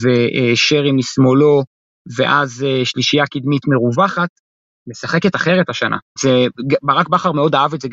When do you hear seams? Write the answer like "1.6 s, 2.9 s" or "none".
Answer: 6.2 s